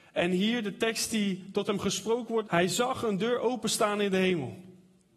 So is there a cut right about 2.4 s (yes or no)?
yes